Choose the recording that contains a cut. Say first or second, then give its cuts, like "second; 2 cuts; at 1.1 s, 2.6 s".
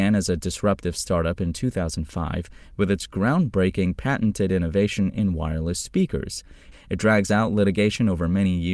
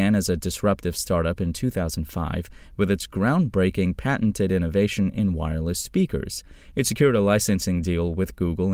first; 1 cut; at 6.7 s